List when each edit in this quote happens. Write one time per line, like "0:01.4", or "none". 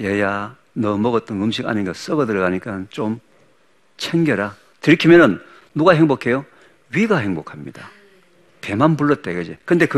0:04.7